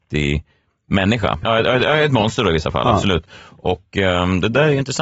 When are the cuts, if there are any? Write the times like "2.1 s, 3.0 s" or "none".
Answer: 1.4 s